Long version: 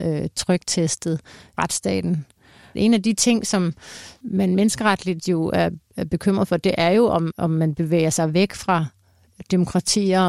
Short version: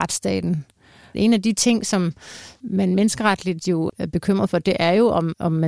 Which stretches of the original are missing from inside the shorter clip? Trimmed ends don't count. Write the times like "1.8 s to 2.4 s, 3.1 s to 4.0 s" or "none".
5.5 s to 5.9 s